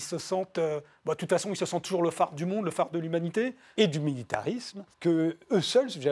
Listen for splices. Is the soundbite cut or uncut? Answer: cut